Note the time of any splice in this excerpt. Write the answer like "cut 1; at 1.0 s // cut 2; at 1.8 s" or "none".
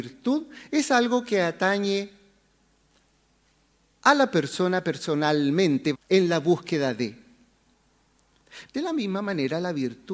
cut 1; at 5.9 s // cut 2; at 8.7 s